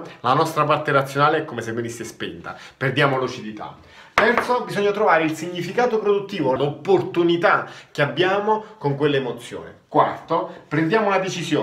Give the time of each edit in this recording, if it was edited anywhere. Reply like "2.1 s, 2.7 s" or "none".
6.6 s